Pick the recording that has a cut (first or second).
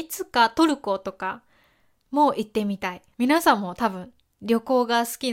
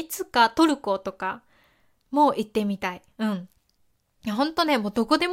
first